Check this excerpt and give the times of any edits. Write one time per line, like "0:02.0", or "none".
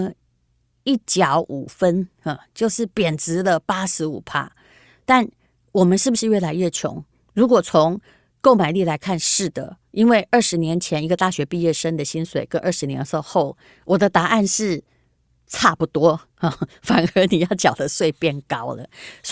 none